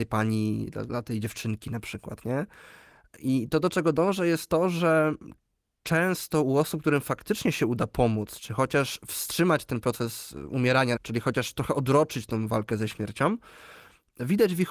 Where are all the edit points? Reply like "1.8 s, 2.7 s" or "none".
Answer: 11.0 s